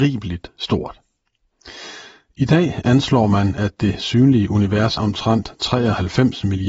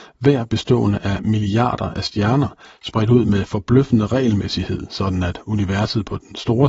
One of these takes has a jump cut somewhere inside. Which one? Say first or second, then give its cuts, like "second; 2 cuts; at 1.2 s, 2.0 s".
first; 1 cut; at 5.0 s